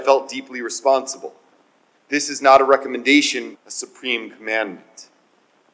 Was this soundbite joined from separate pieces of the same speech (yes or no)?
yes